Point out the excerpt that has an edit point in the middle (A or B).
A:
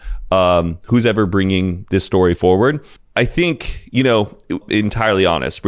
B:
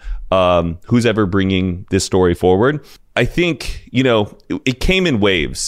A